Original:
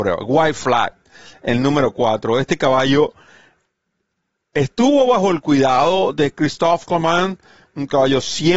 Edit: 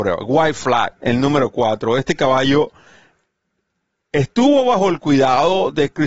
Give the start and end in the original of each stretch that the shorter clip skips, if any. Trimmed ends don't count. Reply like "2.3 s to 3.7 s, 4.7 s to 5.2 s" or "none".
1.0 s to 1.4 s